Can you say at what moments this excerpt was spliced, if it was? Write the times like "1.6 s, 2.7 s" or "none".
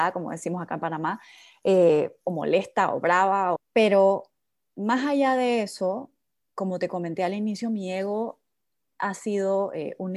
3.6 s